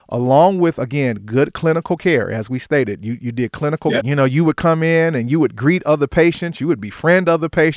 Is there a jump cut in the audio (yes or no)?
yes